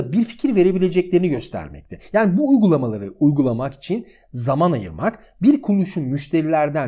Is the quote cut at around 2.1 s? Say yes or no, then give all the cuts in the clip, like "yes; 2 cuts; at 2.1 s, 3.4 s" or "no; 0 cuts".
no; 0 cuts